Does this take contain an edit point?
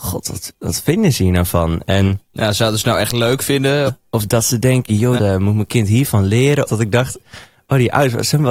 yes; 3 cuts; at 3.9 s, 5.2 s, 6.7 s

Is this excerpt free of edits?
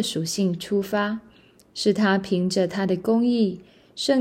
yes; 0 cuts

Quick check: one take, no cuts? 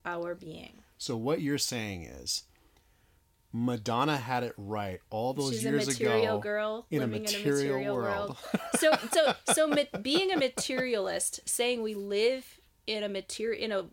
no; 1 cut; at 9.1 s

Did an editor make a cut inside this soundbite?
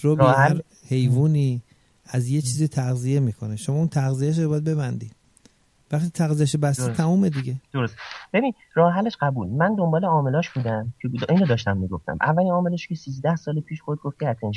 yes; 1 cut; at 7.6 s

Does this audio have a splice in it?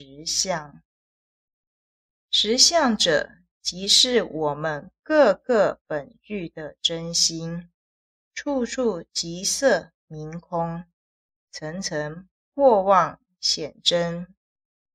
yes; 1 cut; at 8.2 s

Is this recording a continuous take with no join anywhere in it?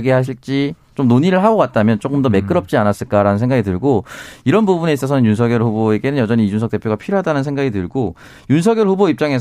yes; 0 cuts

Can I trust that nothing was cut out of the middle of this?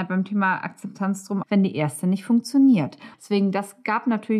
no; 2 cuts; at 1.4 s, 3.1 s

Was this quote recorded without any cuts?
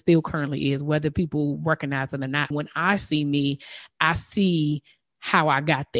no; 1 cut; at 2.5 s

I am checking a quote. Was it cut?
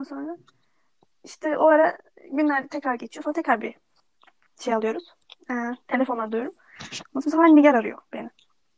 no; 0 cuts

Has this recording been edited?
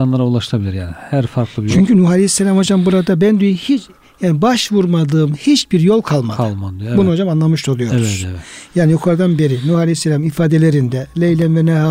no; 0 cuts

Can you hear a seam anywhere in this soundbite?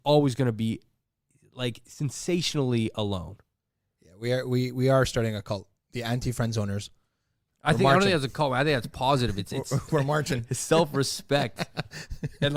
no; 0 cuts

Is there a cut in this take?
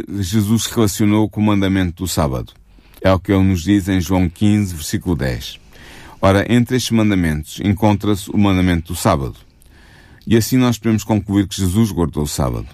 yes; 1 cut; at 3.0 s

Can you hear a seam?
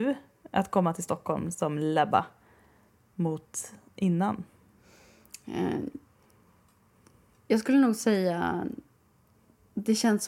no; 0 cuts

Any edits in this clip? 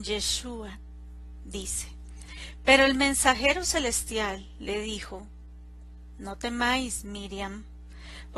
no; 0 cuts

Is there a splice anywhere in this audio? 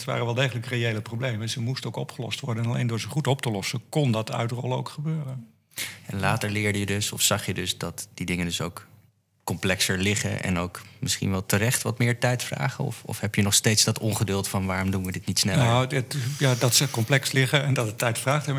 no; 0 cuts

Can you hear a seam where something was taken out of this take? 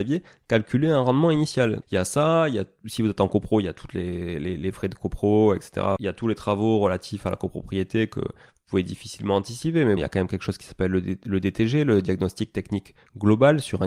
yes; 2 cuts; at 1.8 s, 10.0 s

